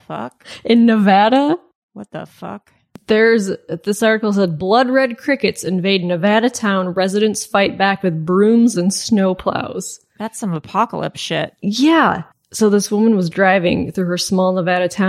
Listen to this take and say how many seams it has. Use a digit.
1